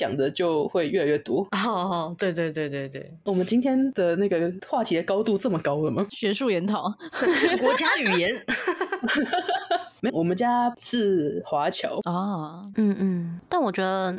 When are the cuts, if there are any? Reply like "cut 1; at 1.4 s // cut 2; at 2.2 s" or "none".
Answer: cut 1; at 10.1 s // cut 2; at 12.7 s